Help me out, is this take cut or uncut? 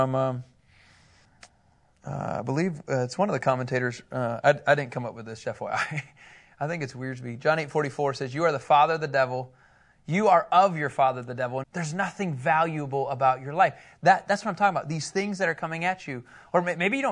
cut